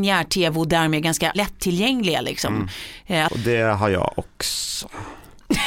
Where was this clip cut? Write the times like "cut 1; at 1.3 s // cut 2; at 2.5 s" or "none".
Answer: cut 1; at 3.3 s